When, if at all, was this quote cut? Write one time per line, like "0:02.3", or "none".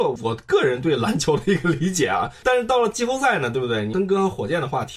none